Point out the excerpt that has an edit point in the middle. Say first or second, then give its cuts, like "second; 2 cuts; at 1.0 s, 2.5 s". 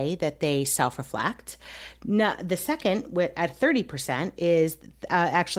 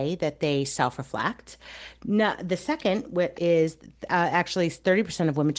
second; 1 cut; at 3.3 s